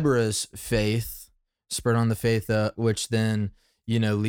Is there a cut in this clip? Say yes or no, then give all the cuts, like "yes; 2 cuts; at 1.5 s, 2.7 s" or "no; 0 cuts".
yes; 1 cut; at 2.7 s